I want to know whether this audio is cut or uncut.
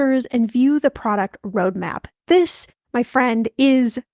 uncut